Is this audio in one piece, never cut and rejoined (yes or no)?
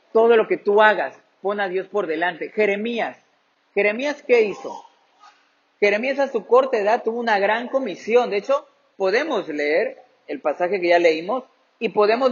yes